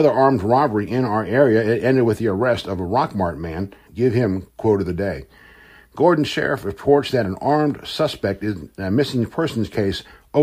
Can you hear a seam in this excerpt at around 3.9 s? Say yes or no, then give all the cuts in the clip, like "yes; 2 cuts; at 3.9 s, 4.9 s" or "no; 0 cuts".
yes; 1 cut; at 3.9 s